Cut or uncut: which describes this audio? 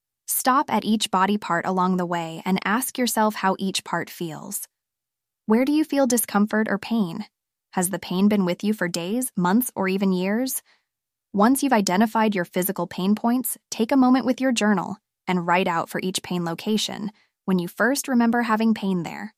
uncut